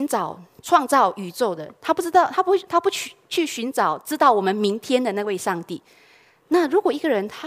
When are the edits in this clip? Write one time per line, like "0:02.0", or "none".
none